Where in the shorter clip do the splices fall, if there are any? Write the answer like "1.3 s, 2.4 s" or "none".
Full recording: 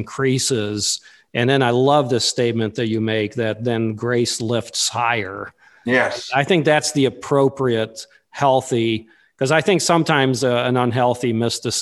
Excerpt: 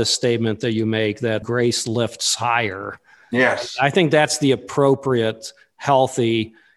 1.4 s